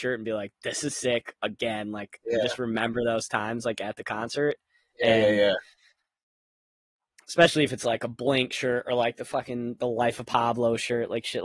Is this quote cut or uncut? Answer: uncut